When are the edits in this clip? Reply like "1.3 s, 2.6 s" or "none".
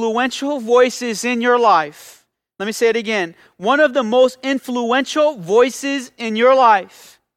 none